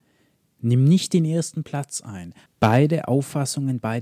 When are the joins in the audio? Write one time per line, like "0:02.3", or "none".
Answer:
0:02.5